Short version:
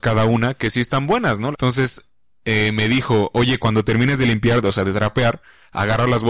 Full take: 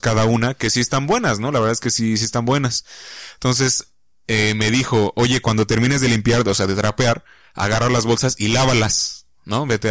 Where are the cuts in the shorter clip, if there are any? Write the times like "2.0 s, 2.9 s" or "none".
1.5 s